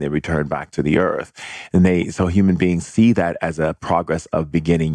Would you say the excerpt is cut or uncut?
uncut